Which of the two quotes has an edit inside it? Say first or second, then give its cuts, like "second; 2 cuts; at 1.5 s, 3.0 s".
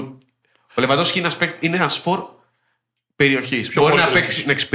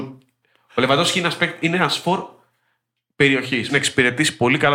second; 1 cut; at 3.7 s